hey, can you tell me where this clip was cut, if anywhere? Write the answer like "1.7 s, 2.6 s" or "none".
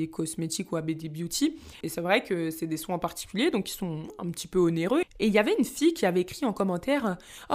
1.8 s, 5.0 s